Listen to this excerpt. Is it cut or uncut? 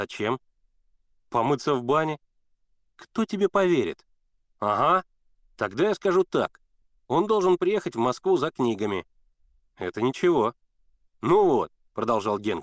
uncut